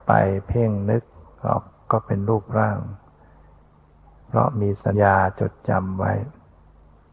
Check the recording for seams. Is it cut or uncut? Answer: cut